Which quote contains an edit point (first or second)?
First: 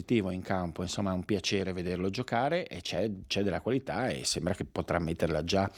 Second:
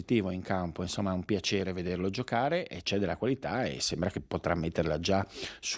second